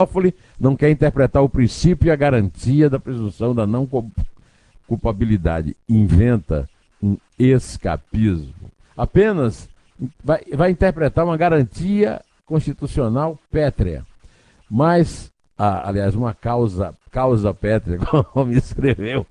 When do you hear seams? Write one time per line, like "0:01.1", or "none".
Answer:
0:08.8